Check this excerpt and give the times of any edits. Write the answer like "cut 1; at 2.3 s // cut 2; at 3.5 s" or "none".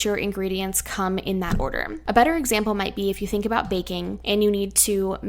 none